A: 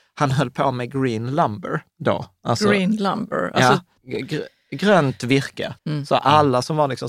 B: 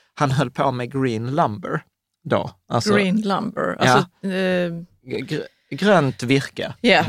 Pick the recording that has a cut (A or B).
A